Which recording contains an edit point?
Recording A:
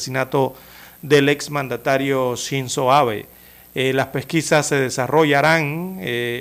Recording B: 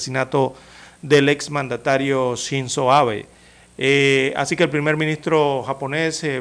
B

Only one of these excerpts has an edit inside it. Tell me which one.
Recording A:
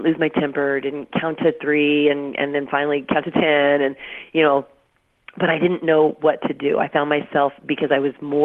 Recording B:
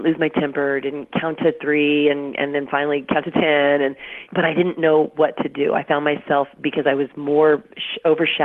B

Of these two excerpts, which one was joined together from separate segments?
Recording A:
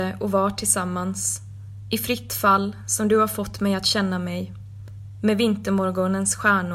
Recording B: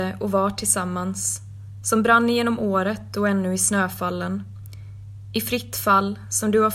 A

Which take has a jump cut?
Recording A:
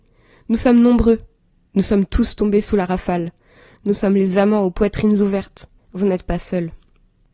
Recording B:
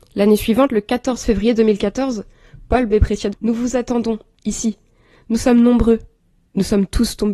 B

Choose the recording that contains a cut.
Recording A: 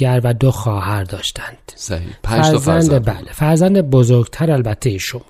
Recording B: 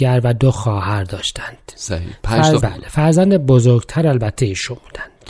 B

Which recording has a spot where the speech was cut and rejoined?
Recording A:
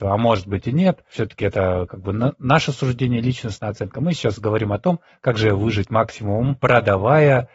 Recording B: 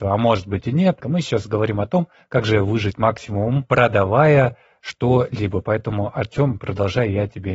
B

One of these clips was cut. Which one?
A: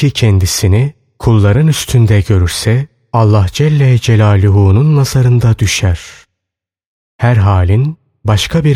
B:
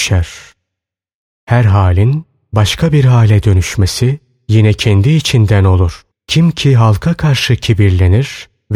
B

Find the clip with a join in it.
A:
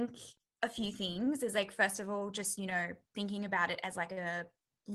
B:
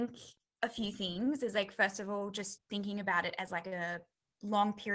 B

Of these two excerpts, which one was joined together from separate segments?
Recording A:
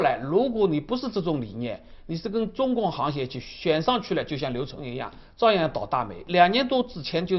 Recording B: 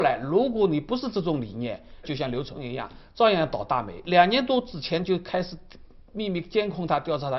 B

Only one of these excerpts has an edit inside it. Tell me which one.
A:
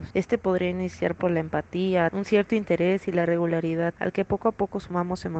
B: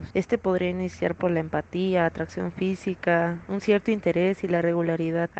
A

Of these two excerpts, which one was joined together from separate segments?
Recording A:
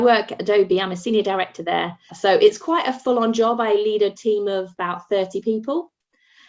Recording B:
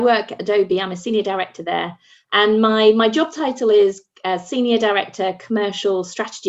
A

